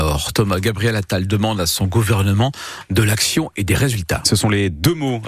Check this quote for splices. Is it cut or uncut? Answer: uncut